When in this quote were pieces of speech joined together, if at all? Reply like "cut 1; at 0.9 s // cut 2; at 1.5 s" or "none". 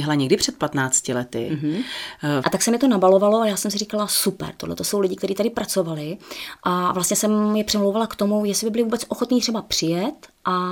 cut 1; at 2.4 s